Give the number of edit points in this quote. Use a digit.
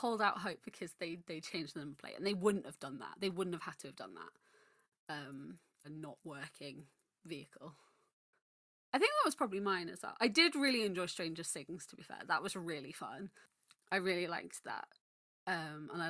1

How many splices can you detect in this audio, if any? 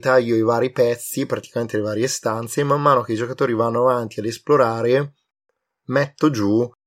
0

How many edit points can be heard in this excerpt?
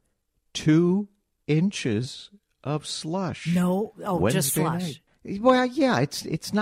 1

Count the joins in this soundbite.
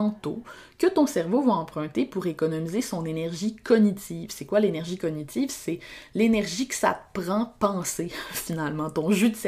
0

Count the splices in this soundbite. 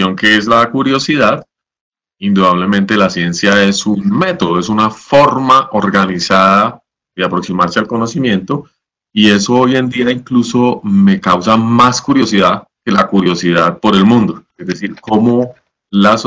1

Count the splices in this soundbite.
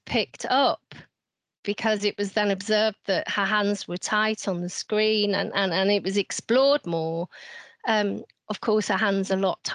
0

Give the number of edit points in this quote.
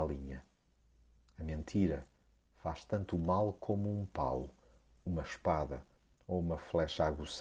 0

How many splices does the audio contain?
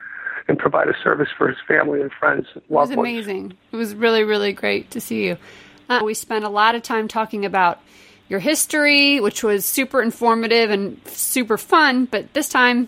1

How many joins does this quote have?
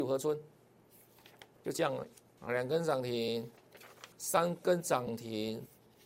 2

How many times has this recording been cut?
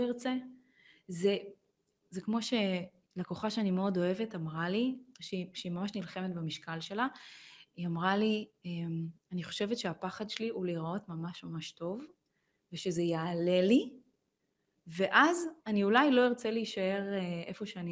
0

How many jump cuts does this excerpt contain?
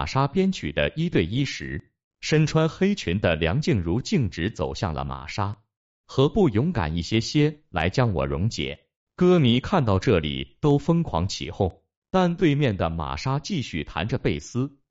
1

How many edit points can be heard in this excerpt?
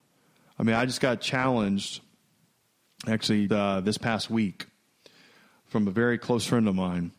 1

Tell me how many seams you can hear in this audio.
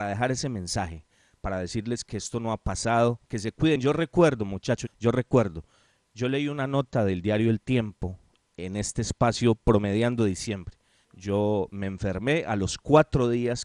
2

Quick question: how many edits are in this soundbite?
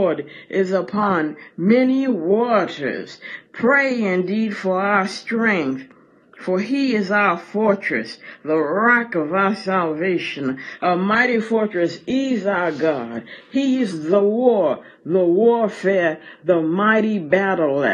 0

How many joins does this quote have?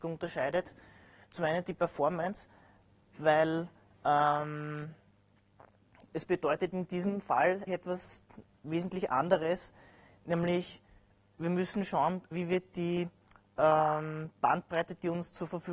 2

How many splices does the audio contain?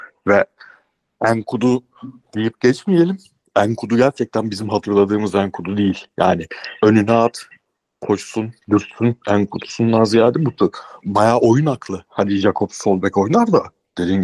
2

